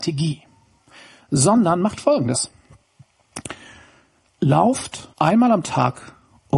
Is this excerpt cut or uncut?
cut